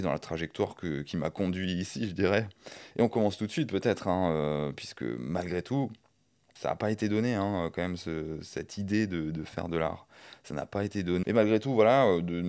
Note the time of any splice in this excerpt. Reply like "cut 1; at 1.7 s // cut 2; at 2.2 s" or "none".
cut 1; at 11.2 s